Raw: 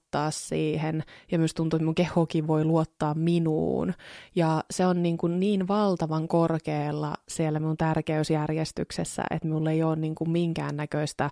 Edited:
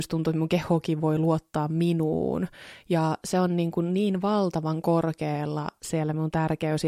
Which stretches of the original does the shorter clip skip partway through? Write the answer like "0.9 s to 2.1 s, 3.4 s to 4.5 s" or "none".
none